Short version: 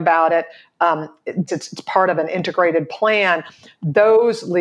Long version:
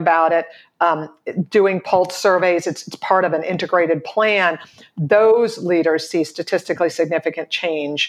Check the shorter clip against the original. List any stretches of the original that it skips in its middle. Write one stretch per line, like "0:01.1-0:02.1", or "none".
0:01.5-0:02.6